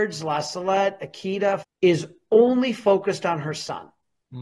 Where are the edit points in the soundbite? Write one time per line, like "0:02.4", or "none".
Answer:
0:01.6